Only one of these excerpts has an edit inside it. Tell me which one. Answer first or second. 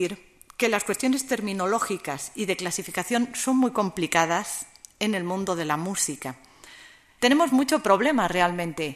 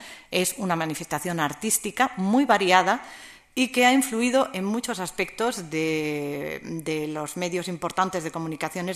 first